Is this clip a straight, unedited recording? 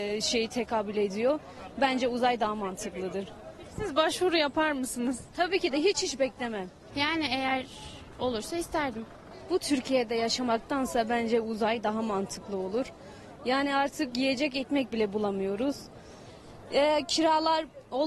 no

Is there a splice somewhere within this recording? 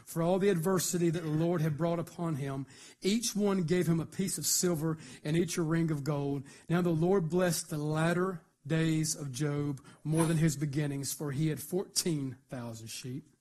no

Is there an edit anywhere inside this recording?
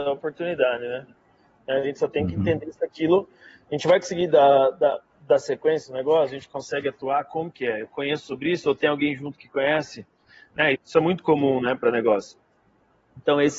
yes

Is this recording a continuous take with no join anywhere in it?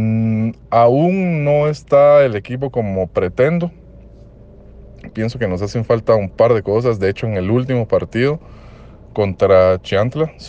no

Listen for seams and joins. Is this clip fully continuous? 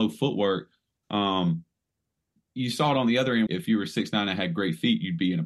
no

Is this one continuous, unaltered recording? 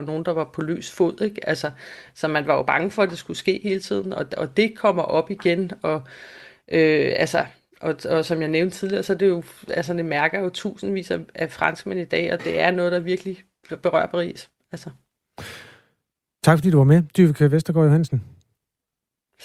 yes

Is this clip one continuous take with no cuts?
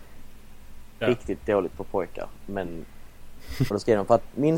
no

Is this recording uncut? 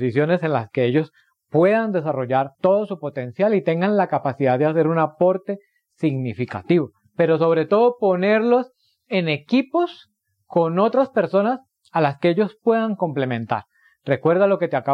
no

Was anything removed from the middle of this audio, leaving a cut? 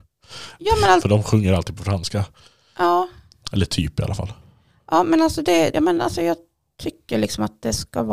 yes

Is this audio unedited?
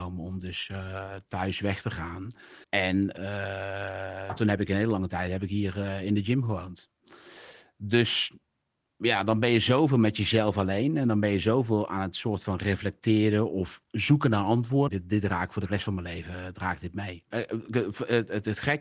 no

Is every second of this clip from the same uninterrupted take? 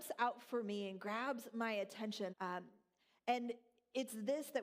no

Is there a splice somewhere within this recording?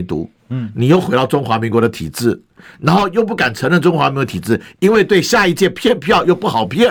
no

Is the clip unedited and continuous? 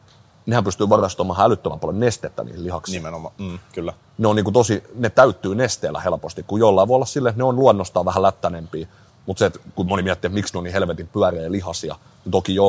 yes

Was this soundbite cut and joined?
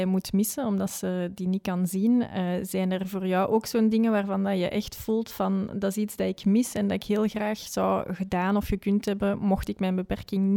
no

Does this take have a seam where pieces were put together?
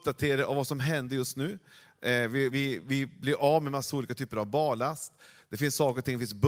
yes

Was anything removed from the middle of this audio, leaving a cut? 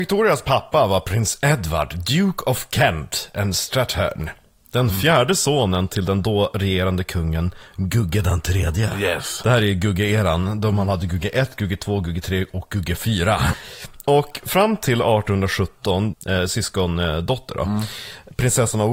yes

